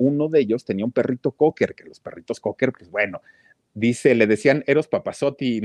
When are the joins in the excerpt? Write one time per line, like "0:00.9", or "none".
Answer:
none

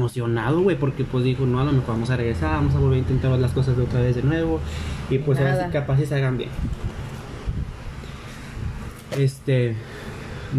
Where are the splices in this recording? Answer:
none

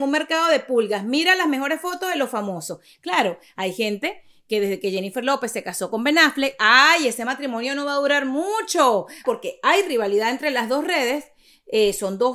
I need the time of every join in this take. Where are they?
0:09.2

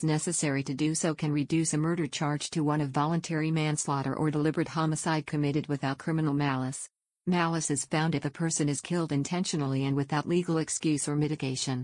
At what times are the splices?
none

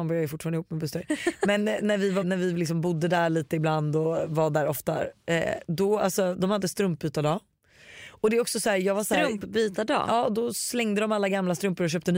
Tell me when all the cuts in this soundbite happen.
0:02.2

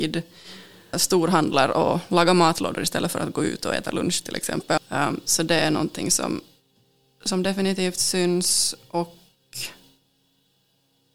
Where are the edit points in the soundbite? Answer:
0:00.9
0:04.8

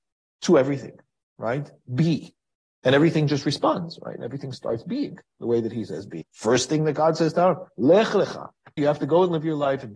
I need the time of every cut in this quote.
0:06.2
0:08.8

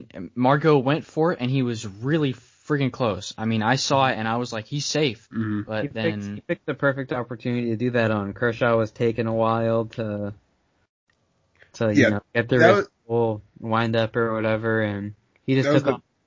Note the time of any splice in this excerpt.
0:05.2

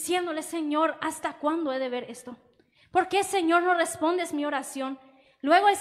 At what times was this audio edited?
none

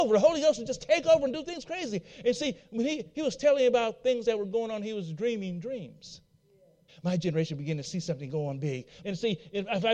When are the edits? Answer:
0:06.9
0:09.0

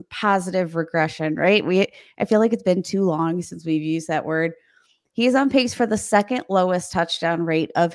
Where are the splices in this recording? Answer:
none

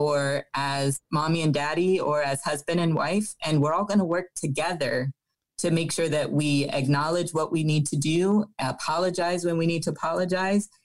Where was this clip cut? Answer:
none

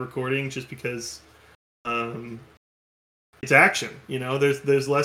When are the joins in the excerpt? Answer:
none

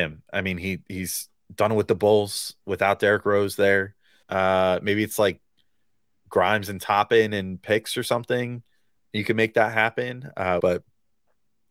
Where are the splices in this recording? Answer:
0:04.2
0:10.6

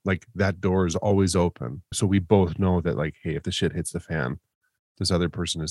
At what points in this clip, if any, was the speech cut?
0:01.9

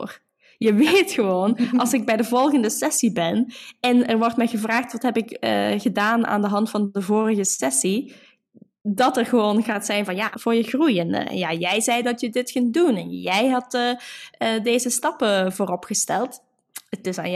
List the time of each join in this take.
0:10.3

